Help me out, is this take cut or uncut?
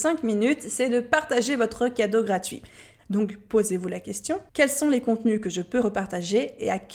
cut